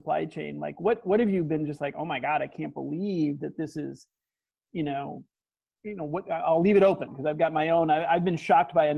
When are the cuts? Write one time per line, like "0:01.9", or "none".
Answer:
none